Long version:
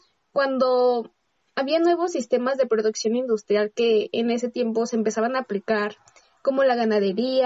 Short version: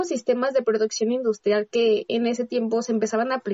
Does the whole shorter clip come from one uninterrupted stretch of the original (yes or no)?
yes